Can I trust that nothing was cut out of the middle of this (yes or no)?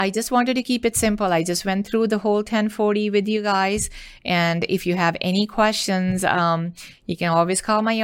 yes